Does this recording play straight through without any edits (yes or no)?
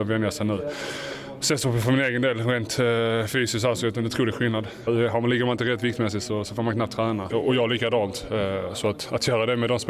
no